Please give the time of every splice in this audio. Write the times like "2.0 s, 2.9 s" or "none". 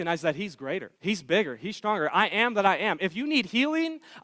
1.0 s